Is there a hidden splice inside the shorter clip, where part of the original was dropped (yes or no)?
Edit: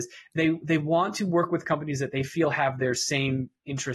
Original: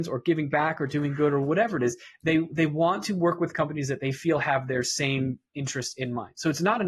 no